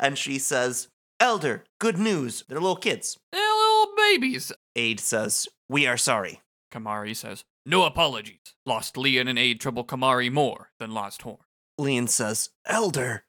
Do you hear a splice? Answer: yes; 2 cuts; at 2.4 s, 4.6 s

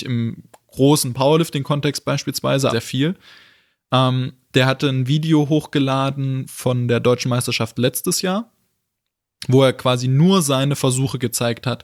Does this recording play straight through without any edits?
no; 1 cut; at 2.7 s

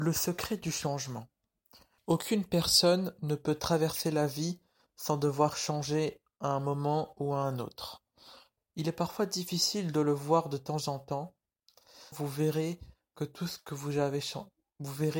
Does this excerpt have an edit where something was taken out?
yes; 3 cuts; at 2.0 s, 8.6 s, 12.1 s

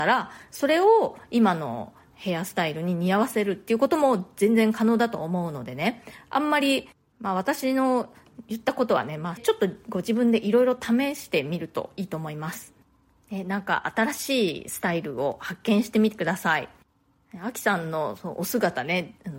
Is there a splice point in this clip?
yes; 1 cut; at 9.4 s

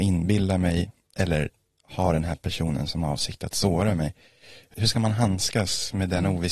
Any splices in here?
yes; 1 cut; at 4.7 s

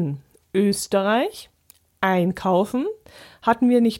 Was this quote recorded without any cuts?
yes; 0 cuts

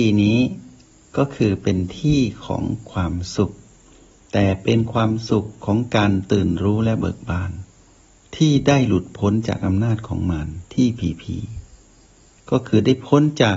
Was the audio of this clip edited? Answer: no; 0 cuts

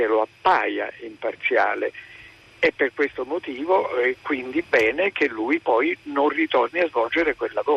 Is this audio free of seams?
yes; 0 cuts

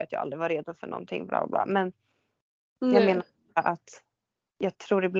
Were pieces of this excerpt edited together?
no; 0 cuts

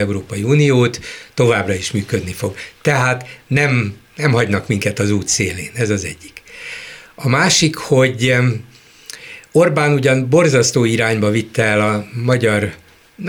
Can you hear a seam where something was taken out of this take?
no; 0 cuts

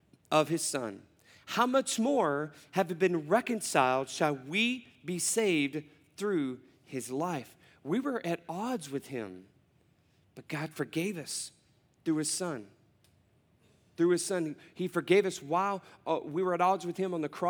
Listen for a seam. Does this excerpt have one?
no; 0 cuts

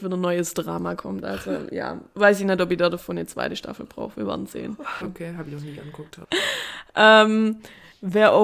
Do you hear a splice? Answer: yes; 2 cuts; at 5.0 s, 6.2 s

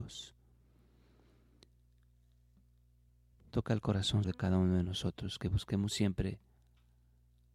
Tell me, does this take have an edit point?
yes; 1 cut; at 4.2 s

